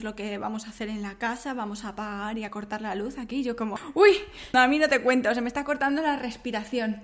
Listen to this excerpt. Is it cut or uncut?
cut